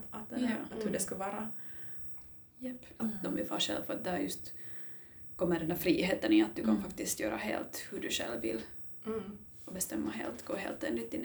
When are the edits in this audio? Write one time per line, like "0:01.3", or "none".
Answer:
0:03.0